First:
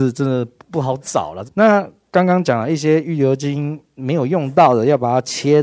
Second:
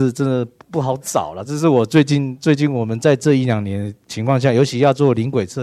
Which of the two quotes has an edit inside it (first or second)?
first